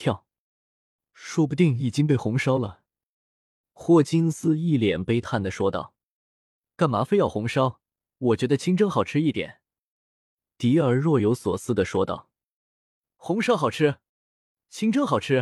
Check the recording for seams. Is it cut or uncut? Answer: cut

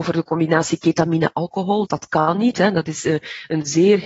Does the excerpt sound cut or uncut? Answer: cut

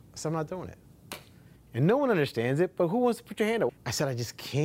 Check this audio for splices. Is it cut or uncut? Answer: cut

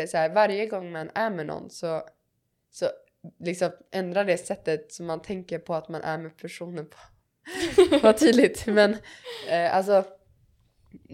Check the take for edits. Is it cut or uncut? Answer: uncut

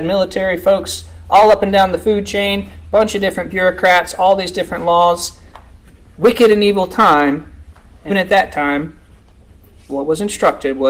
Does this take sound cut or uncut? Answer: cut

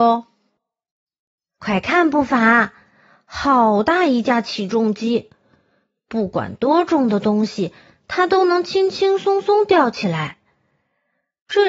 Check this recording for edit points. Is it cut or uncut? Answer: uncut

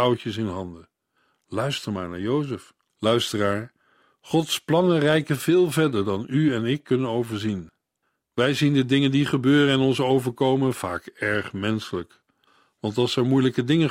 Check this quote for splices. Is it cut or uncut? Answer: cut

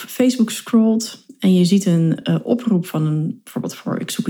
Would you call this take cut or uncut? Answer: uncut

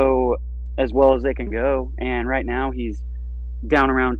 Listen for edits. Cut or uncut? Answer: uncut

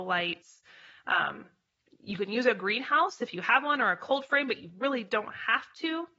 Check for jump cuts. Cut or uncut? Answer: uncut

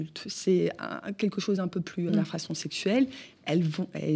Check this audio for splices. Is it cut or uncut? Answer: cut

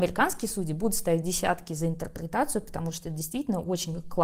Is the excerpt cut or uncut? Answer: uncut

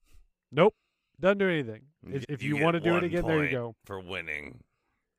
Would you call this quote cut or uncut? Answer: cut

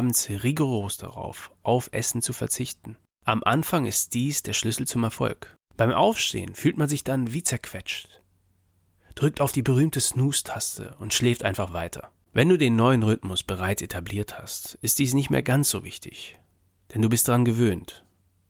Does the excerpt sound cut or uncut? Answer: cut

